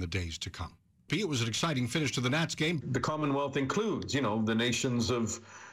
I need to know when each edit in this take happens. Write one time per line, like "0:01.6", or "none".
0:01.1
0:02.8